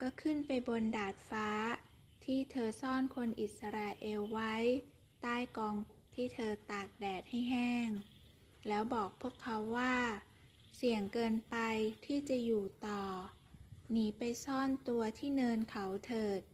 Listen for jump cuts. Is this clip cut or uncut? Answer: cut